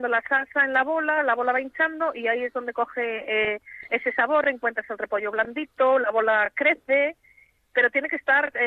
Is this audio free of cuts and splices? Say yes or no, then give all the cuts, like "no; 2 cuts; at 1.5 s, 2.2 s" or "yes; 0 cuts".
yes; 0 cuts